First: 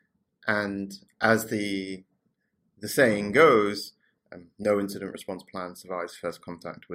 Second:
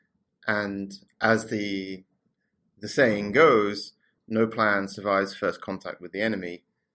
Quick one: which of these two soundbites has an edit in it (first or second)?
first